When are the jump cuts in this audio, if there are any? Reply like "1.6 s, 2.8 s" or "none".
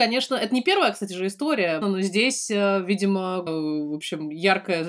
1.8 s, 3.5 s